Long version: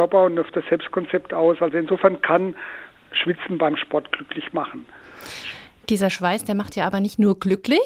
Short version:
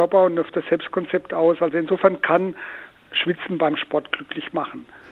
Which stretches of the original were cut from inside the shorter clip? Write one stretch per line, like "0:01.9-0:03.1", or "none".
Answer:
none